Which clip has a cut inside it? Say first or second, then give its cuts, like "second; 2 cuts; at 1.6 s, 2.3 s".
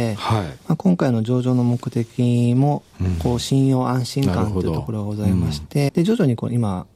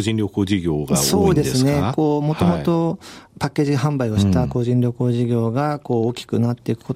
first; 1 cut; at 5.9 s